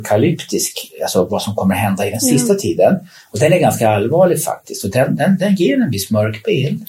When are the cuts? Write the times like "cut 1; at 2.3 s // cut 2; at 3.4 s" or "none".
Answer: none